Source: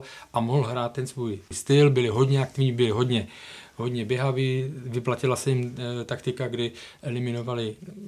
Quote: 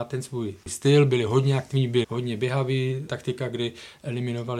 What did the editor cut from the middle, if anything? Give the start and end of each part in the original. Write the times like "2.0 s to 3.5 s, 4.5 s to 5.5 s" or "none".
2.9 s to 3.7 s, 4.7 s to 6.1 s